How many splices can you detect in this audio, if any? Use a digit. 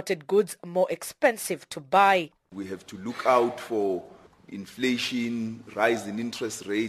0